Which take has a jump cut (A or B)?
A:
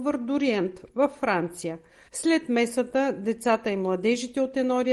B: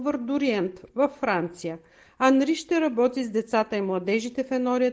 A